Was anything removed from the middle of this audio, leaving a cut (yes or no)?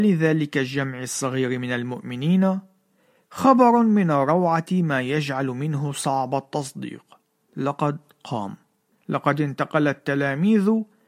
yes